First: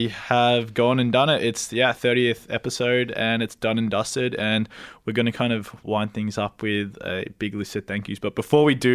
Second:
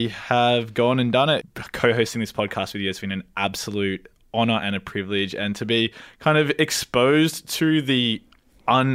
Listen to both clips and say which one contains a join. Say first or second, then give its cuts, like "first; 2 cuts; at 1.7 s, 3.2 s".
second; 1 cut; at 1.4 s